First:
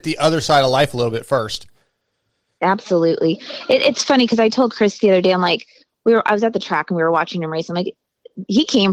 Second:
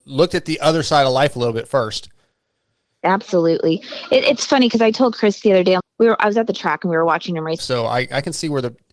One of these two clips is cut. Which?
second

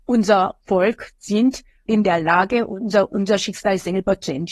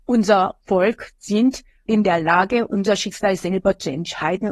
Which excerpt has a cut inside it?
second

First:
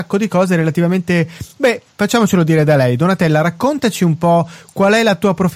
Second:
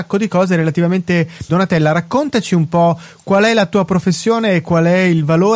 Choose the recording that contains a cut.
second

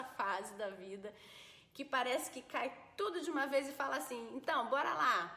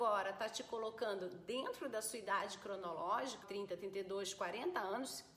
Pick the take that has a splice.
second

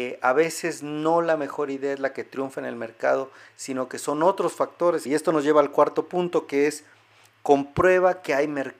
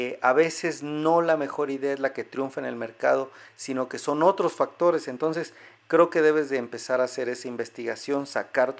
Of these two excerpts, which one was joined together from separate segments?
first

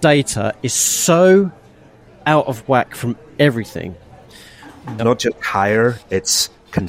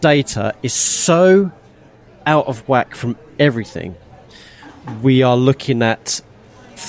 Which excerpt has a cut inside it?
first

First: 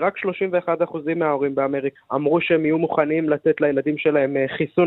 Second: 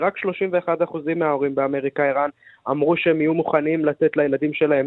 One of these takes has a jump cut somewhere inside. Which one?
first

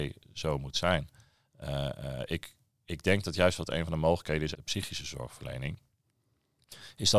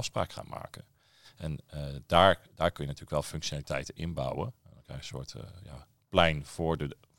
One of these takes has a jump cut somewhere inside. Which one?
first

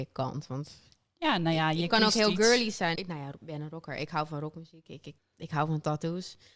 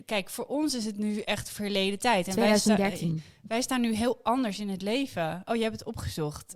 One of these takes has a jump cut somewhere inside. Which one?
first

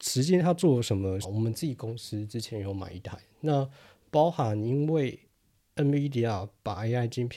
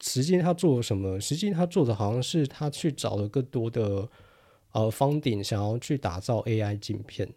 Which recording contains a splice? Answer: first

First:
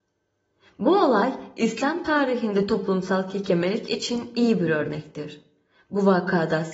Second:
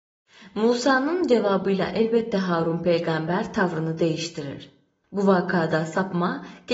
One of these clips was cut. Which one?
second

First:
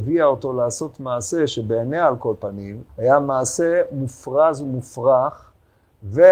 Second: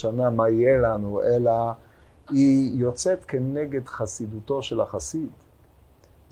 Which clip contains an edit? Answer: first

